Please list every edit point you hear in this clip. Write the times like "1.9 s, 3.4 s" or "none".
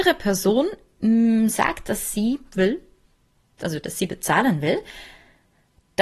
none